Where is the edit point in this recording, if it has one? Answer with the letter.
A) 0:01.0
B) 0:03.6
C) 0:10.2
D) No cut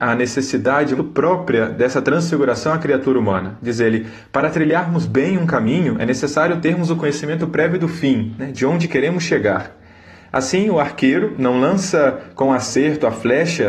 A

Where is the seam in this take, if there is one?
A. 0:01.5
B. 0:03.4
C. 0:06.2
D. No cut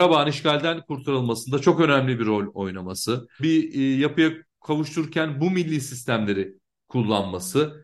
B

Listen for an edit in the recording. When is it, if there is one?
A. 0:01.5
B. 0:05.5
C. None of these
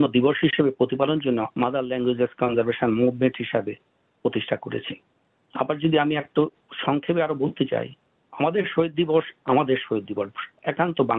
A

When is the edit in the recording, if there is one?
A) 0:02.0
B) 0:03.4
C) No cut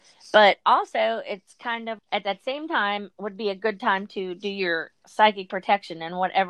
A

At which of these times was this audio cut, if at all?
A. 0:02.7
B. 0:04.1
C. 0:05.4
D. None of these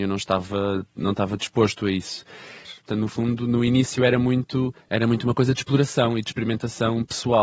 A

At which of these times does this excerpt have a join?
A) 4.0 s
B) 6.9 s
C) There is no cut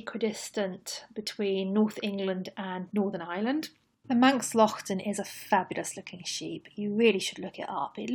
C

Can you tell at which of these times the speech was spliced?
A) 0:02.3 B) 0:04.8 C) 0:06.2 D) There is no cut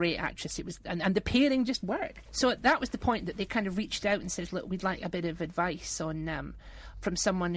A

